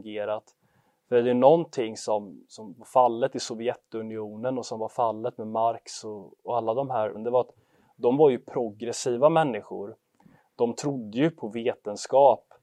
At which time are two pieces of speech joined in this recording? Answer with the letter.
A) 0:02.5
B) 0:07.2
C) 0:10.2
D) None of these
B